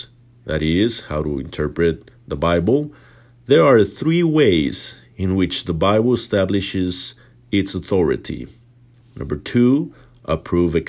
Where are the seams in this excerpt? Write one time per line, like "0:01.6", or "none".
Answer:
0:09.0